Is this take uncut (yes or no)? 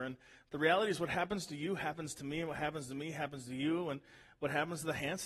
yes